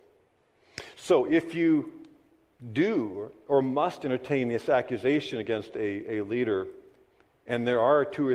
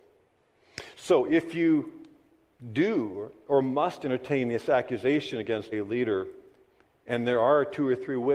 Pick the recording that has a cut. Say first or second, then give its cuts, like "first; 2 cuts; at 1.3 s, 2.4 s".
second; 1 cut; at 5.7 s